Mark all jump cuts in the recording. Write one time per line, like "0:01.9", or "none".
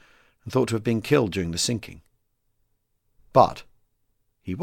none